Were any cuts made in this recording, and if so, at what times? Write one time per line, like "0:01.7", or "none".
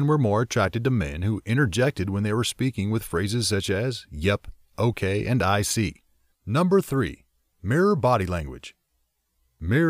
0:06.3